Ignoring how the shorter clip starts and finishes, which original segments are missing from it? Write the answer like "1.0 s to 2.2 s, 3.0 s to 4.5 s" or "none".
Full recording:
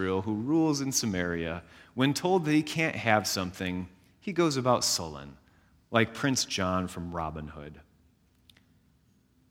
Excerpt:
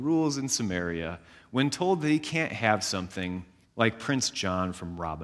4.1 s to 5.8 s